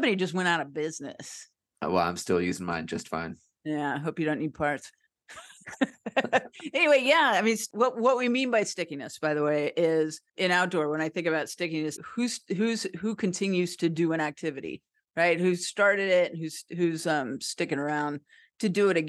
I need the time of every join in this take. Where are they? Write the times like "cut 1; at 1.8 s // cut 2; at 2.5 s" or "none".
cut 1; at 10.3 s // cut 2; at 12.0 s